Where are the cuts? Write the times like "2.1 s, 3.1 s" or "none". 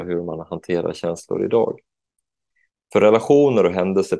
2.7 s

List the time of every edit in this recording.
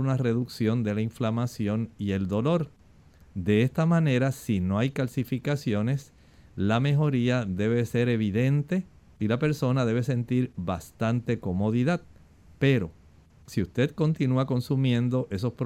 none

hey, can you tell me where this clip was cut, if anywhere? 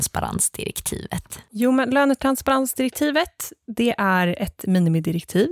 none

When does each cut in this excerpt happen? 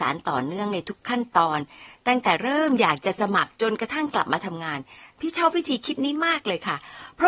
none

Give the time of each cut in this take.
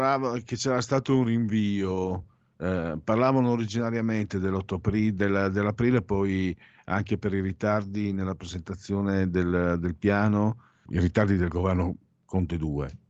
10.9 s

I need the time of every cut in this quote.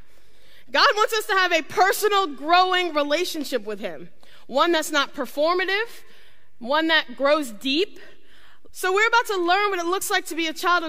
8.7 s

